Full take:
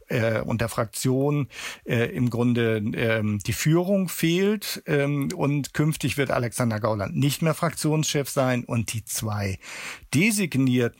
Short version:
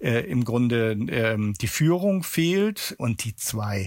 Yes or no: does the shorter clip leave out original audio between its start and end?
yes